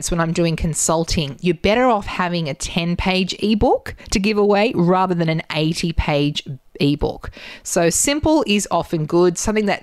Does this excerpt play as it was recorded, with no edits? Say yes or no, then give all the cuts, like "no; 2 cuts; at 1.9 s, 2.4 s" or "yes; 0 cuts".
yes; 0 cuts